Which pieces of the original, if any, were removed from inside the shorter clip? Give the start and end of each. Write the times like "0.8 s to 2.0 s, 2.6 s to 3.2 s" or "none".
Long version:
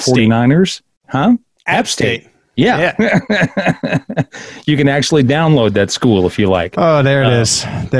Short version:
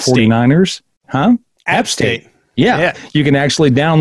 2.9 s to 4.5 s